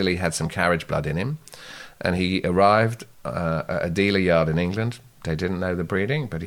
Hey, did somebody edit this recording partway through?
no; 0 cuts

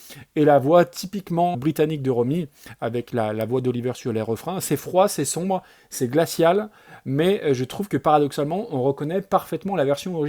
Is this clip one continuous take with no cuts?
no; 1 cut; at 1.5 s

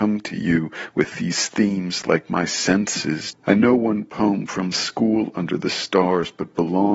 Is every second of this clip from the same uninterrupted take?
no; 1 cut; at 3.3 s

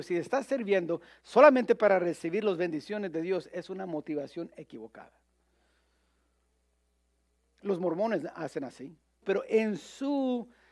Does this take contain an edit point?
yes; 1 cut; at 9.2 s

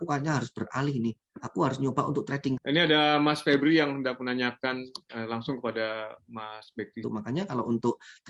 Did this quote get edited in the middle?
yes; 2 cuts; at 2.6 s, 7.0 s

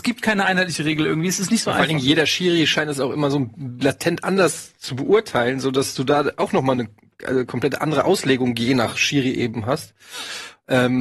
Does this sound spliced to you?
no; 0 cuts

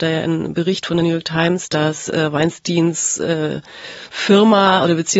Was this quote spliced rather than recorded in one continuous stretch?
no; 0 cuts

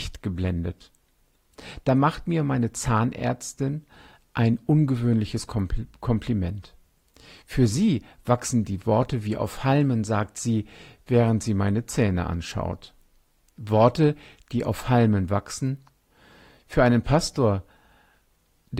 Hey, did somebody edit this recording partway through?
no; 0 cuts

